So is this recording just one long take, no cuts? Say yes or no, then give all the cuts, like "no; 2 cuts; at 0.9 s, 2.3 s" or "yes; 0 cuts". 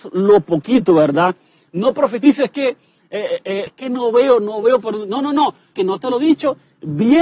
no; 2 cuts; at 3.7 s, 5.7 s